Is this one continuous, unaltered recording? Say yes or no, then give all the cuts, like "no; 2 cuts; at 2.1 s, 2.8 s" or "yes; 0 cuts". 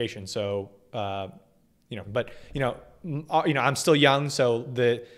no; 1 cut; at 2.0 s